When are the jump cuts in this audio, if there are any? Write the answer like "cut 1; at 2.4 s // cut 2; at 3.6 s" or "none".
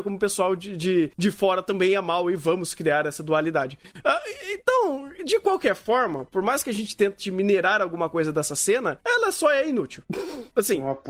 none